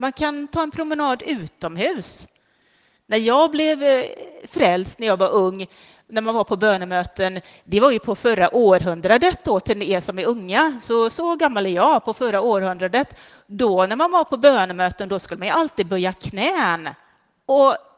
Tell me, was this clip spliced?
no; 0 cuts

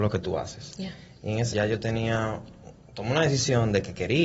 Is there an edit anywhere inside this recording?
yes; 1 cut; at 1.5 s

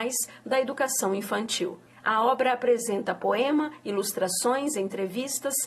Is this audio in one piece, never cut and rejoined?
yes; 0 cuts

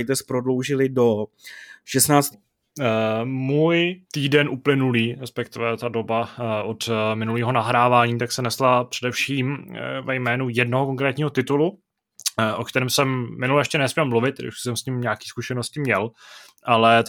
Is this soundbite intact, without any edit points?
no; 2 cuts; at 2.3 s, 4.1 s

